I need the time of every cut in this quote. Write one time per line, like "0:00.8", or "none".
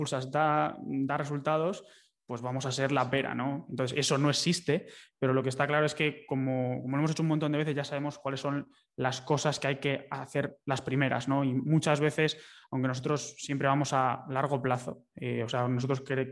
none